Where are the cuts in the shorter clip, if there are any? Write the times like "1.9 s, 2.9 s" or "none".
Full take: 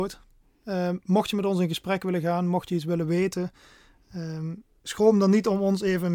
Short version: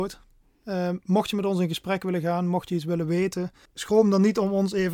3.7 s

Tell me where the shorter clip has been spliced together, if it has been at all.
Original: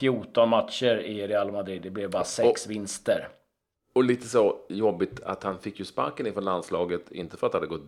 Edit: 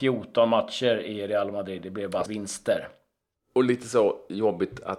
2.3 s

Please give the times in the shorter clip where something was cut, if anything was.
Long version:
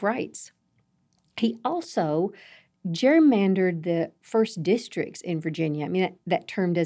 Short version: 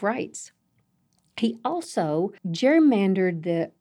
2.4 s

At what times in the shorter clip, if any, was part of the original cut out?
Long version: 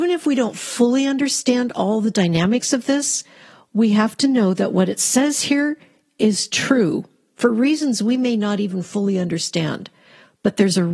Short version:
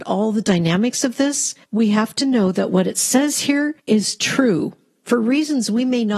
1.6 s, 3.8 s

